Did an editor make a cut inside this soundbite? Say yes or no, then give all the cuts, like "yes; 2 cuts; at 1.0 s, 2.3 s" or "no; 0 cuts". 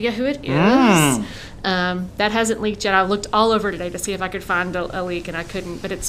no; 0 cuts